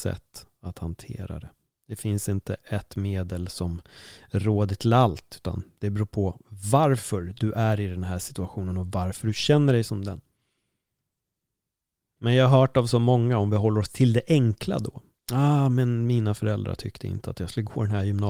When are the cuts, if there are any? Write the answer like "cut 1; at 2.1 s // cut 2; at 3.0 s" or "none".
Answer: none

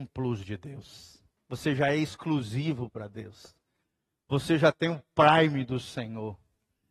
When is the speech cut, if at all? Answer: cut 1; at 1.4 s

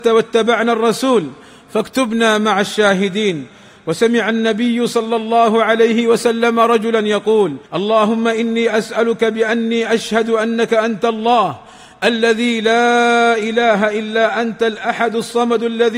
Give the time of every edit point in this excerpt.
cut 1; at 7.7 s

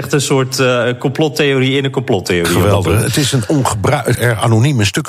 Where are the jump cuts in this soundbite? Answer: cut 1; at 4.1 s

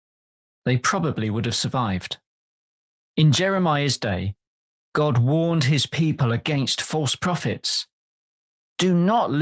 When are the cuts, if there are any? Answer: cut 1; at 3.0 s

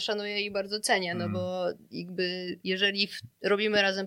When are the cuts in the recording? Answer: cut 1; at 2.6 s

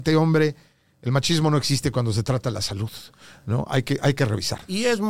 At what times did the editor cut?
none

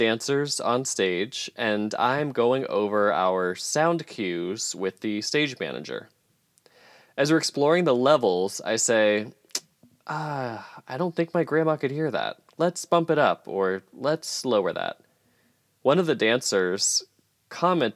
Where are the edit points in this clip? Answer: none

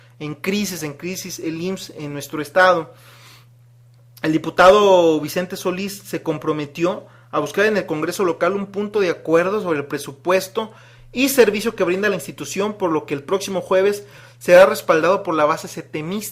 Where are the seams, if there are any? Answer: none

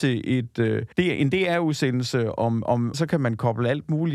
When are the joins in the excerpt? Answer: cut 1; at 0.9 s // cut 2; at 2.9 s

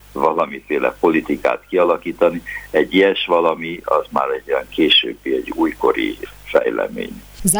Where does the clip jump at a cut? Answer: none

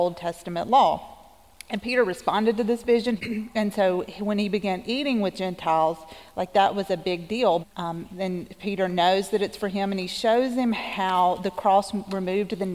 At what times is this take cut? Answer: cut 1; at 3.2 s // cut 2; at 7.6 s

